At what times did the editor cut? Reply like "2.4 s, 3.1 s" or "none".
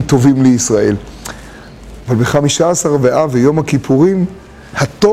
2.0 s